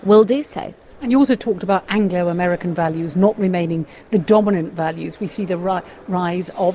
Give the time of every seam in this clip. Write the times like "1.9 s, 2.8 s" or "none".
none

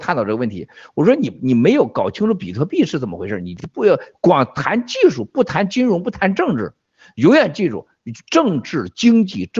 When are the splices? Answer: none

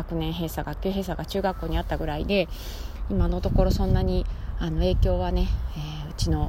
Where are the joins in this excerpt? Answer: none

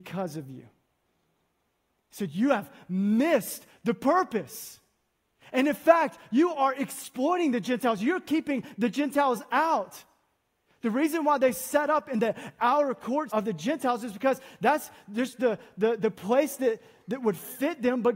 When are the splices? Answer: 13.3 s

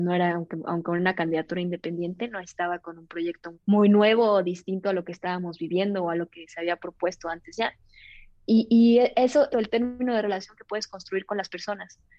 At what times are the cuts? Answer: 3.5 s, 9.5 s

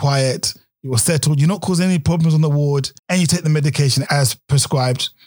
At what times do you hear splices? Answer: 3.0 s, 4.1 s

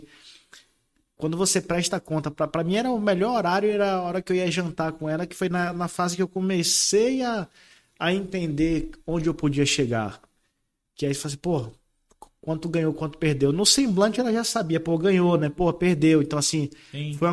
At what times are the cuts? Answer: none

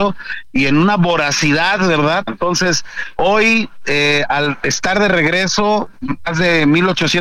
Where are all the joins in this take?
2.3 s

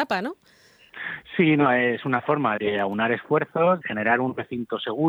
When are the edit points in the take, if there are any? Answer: 2.6 s, 3.8 s

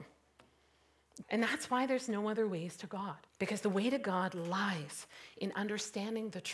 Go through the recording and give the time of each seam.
1.2 s, 3.3 s

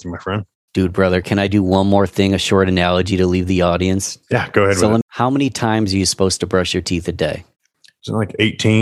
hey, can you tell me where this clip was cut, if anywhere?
5.0 s

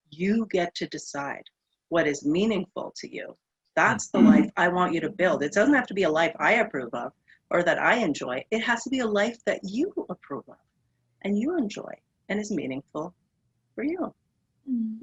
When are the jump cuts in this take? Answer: none

